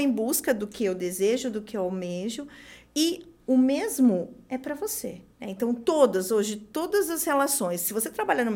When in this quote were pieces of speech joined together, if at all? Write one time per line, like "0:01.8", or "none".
0:05.3